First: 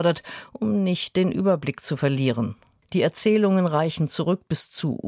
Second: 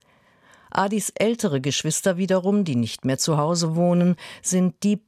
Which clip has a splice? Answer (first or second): first